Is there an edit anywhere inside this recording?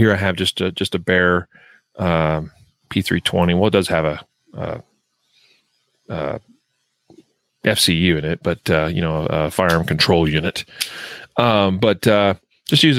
no; 0 cuts

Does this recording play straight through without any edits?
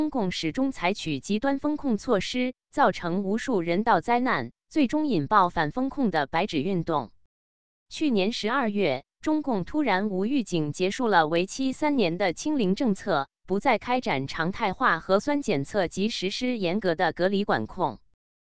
yes; 0 cuts

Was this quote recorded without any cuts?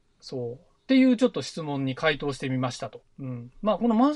no; 1 cut; at 3.0 s

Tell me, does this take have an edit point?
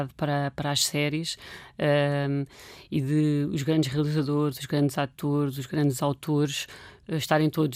no; 0 cuts

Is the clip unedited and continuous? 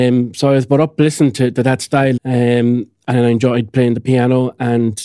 no; 1 cut; at 2.2 s

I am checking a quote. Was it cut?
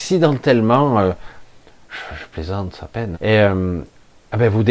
yes; 1 cut; at 3.1 s

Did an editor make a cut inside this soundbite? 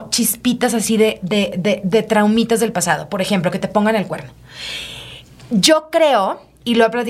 no; 0 cuts

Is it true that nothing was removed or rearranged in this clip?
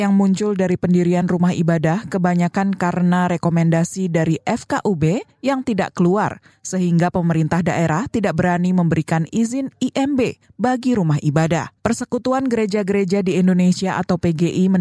no; 1 cut; at 11.8 s

